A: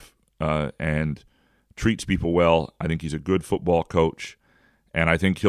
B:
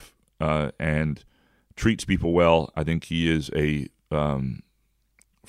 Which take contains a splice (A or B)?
B